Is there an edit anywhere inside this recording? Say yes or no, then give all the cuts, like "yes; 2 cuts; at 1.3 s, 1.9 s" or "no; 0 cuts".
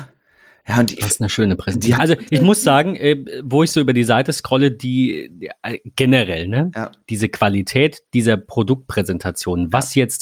yes; 1 cut; at 2.0 s